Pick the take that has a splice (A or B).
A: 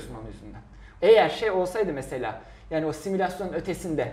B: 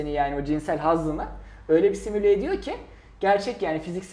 A